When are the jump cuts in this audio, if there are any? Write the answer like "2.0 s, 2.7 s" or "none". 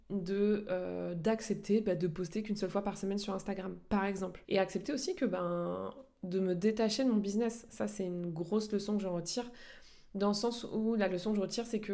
4.4 s